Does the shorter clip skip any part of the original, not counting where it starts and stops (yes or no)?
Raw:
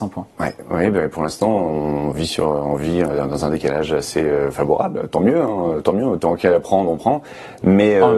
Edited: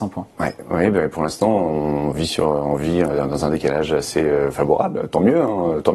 no